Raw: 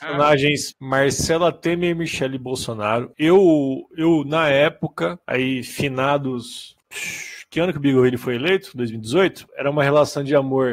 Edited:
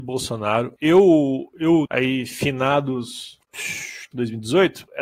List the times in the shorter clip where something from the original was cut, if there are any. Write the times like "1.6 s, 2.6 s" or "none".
1.9 s, 4.1 s